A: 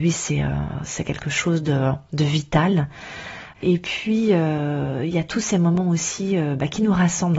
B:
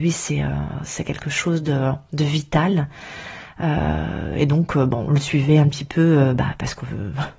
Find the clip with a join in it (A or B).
A